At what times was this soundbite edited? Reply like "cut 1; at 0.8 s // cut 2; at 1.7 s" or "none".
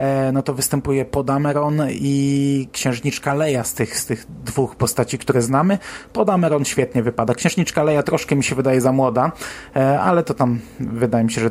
none